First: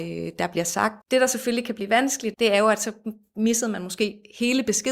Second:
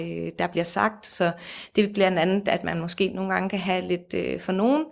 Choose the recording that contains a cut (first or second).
first